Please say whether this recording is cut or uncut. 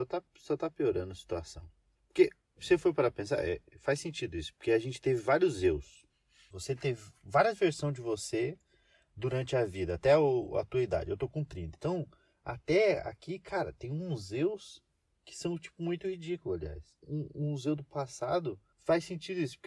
cut